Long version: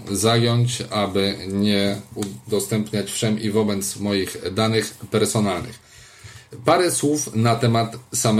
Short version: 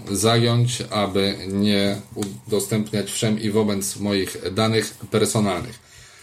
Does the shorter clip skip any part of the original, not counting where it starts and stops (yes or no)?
no